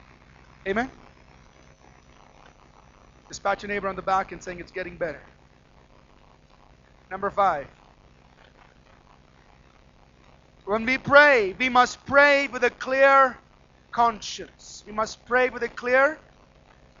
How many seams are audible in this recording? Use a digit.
0